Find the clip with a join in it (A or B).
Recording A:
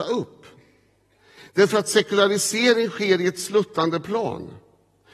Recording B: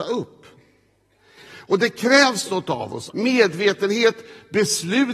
B